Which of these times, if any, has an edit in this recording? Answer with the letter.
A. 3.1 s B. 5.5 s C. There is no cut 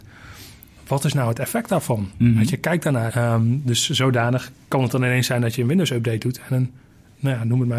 A